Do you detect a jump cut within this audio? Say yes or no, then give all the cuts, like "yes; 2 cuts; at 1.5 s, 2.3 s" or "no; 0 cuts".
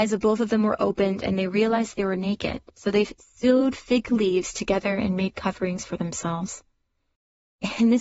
no; 0 cuts